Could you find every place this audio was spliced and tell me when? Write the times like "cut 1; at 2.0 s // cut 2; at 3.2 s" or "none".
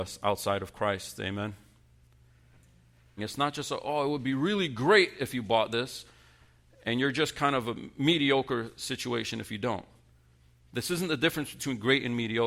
cut 1; at 3.2 s